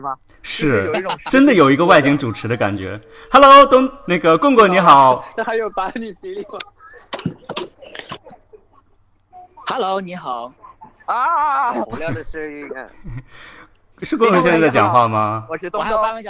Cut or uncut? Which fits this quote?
uncut